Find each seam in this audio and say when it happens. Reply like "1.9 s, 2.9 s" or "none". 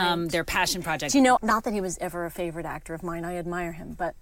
1.4 s